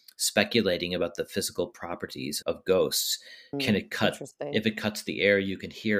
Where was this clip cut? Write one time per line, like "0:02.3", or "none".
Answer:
0:02.4